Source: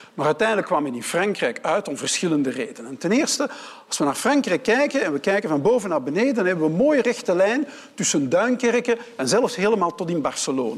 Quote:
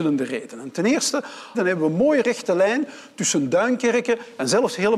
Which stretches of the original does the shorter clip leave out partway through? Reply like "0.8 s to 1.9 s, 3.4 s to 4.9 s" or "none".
3.8 s to 6.3 s